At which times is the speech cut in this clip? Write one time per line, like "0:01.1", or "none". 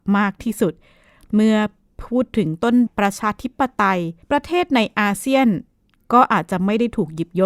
0:02.9
0:04.2